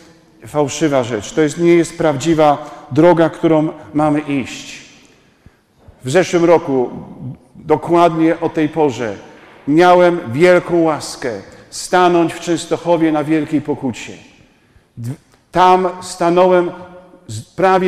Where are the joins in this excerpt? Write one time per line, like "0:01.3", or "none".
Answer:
none